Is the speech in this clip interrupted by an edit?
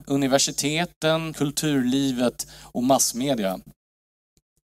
yes; 1 cut; at 1.3 s

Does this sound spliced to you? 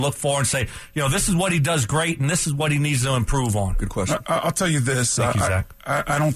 no; 0 cuts

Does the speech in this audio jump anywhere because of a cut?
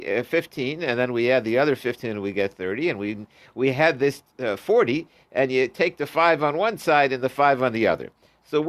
no; 0 cuts

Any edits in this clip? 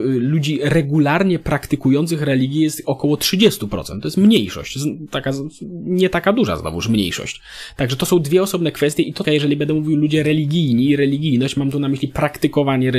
yes; 1 cut; at 9.2 s

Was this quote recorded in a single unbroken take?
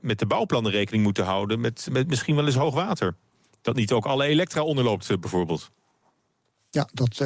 no; 1 cut; at 1.9 s

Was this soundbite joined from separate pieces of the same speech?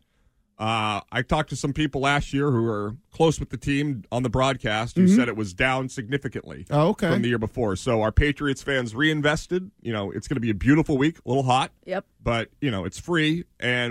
no; 0 cuts

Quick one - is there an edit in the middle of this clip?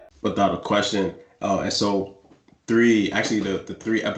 no; 0 cuts

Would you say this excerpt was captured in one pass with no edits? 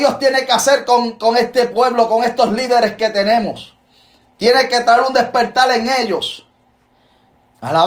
yes; 0 cuts

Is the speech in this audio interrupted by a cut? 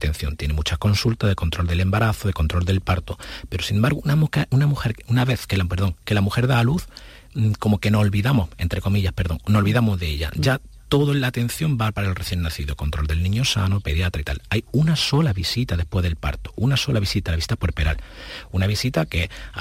no; 0 cuts

